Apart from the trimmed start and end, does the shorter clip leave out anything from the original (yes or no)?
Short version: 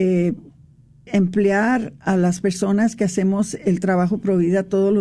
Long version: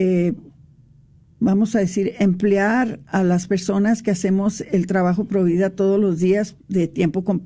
yes